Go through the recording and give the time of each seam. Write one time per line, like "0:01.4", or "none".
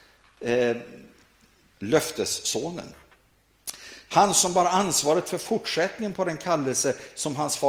0:01.7
0:04.1